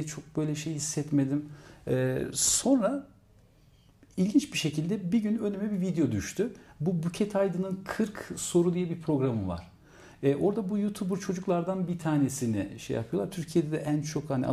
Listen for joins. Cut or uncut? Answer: uncut